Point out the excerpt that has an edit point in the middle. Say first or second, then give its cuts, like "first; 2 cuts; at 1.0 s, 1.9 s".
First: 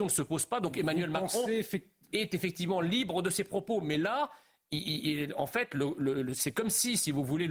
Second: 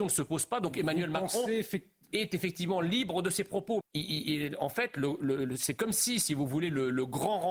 second; 1 cut; at 3.8 s